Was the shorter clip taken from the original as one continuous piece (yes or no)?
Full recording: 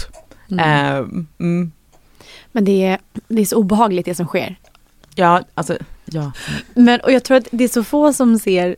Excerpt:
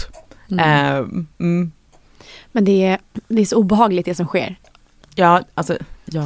yes